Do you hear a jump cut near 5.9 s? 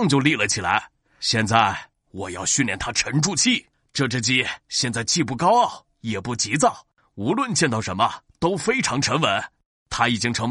no; 1 cut; at 3.7 s

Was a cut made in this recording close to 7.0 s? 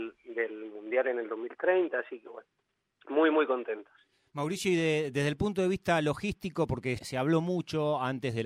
yes; 1 cut; at 7.0 s

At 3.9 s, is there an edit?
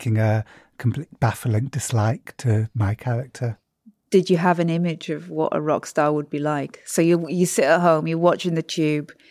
no; 0 cuts

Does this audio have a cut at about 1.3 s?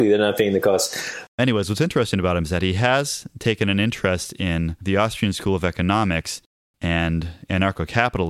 yes; 1 cut; at 1.3 s

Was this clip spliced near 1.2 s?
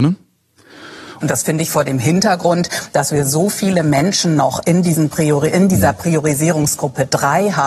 yes; 1 cut; at 1.2 s

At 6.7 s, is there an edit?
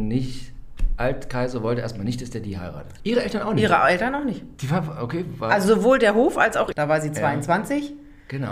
yes; 2 cuts; at 3.0 s, 6.7 s

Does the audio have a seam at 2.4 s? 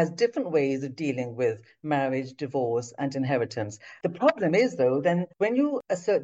no; 1 cut; at 4.0 s

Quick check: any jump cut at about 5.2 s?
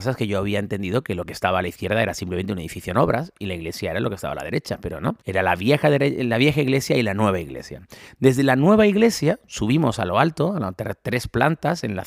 yes; 1 cut; at 5.2 s

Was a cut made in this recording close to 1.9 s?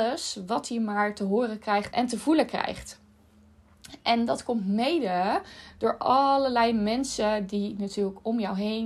yes; 1 cut; at 1.9 s

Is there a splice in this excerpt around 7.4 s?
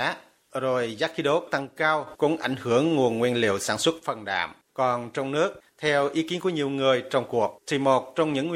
no; 1 cut; at 4.6 s

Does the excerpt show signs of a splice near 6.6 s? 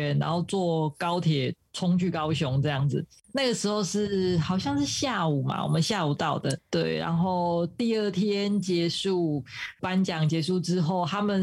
yes; 1 cut; at 6.6 s

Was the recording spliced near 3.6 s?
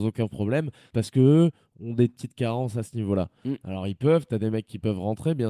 no; 1 cut; at 0.9 s

